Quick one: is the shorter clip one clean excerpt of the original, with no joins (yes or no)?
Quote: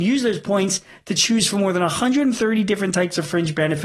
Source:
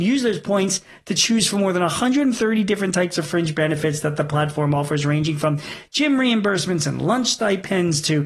yes